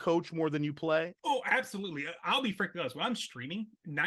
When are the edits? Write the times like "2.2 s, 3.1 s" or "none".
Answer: 1.2 s